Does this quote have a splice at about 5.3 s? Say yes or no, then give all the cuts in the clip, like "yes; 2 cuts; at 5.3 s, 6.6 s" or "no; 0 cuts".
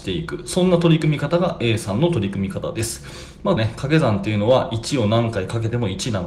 no; 1 cut; at 3.6 s